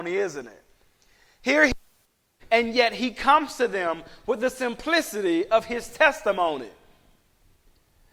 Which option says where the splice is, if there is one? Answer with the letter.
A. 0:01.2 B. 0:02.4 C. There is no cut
B